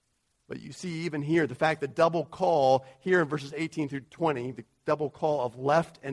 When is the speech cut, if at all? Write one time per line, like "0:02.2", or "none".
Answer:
0:04.5